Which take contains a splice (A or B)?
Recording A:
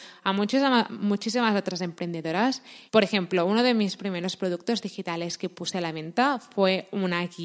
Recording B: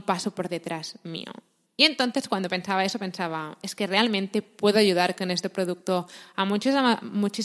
A